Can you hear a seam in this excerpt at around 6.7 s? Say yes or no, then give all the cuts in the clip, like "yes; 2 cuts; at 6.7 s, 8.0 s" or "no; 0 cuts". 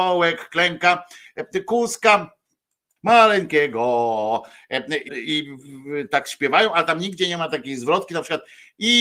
no; 2 cuts; at 3.0 s, 5.1 s